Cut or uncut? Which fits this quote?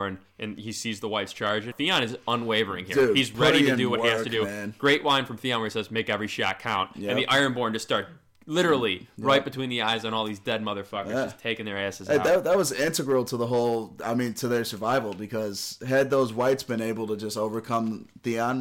cut